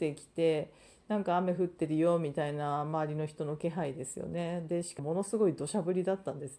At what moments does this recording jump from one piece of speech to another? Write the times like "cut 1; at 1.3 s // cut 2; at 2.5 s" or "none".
cut 1; at 5.0 s